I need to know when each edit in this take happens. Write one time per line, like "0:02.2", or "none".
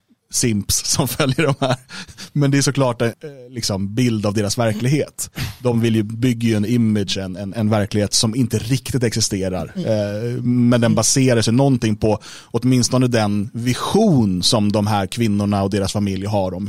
0:03.1
0:07.5